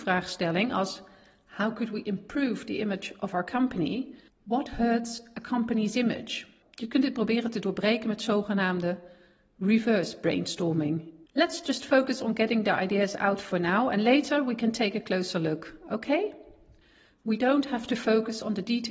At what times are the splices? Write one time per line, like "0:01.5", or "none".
0:04.3
0:06.6
0:11.3